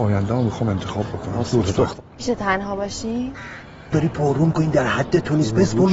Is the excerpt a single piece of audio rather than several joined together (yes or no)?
no